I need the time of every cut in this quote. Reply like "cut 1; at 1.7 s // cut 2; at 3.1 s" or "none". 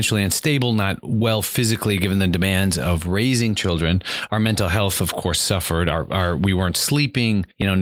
none